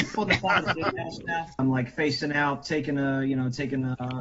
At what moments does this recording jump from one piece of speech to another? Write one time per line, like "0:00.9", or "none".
0:01.6